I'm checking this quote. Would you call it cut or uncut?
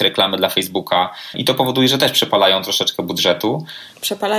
cut